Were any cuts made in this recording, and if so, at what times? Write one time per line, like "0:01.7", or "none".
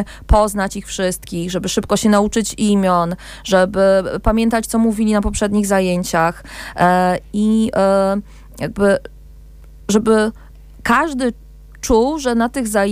none